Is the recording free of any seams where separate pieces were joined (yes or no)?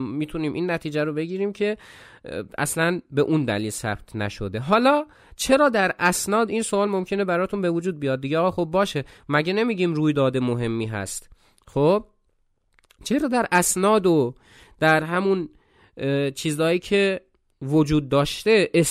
yes